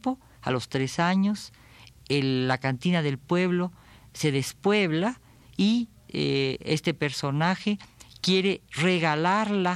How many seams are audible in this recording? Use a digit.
0